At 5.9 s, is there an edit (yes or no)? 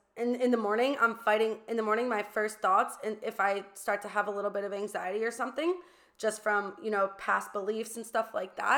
no